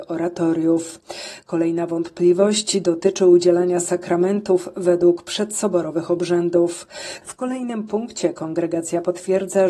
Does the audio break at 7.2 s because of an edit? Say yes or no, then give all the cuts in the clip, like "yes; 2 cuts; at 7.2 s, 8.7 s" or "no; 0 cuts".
yes; 1 cut; at 7.2 s